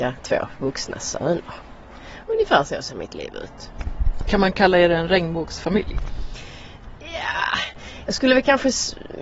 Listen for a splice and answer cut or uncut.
uncut